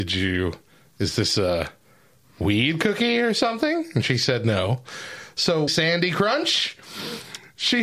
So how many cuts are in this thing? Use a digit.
1